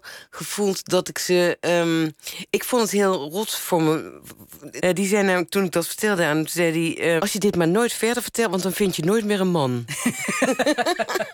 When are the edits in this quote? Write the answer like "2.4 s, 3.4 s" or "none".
4.8 s, 7.2 s